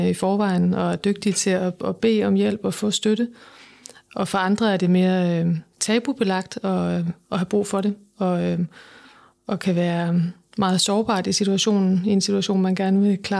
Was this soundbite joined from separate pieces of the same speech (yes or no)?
no